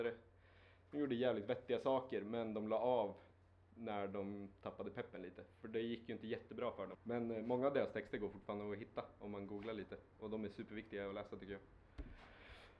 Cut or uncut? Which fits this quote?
cut